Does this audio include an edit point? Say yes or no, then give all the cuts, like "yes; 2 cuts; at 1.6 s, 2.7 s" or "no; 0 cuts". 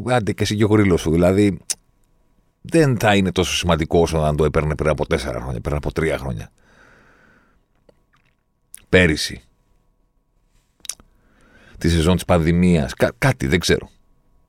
no; 0 cuts